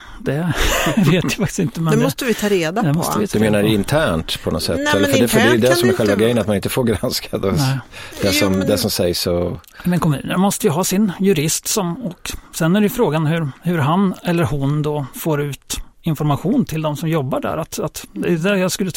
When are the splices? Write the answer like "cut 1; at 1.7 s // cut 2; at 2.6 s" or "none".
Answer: none